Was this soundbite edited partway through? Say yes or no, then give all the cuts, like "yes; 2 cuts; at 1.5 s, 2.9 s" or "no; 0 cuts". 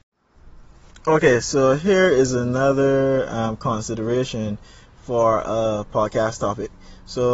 no; 0 cuts